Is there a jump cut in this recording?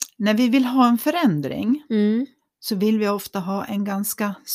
no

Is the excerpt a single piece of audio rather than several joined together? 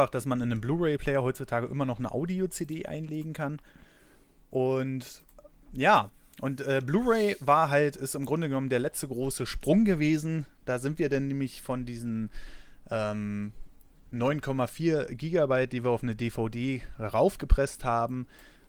yes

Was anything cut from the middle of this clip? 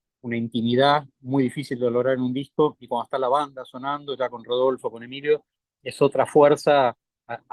yes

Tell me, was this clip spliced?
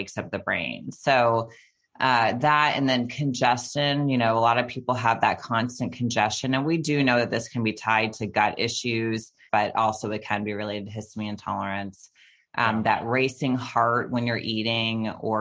yes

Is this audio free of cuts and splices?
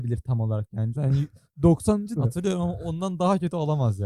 no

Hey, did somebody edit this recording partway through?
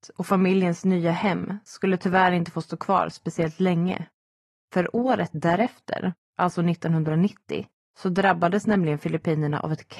no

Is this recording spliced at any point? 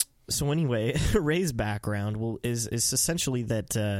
no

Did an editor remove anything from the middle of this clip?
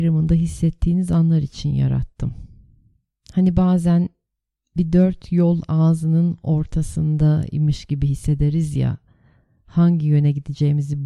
no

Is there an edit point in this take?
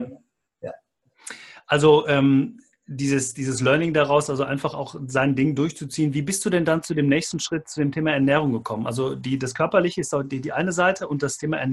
no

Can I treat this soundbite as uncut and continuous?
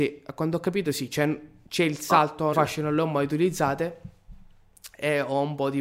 no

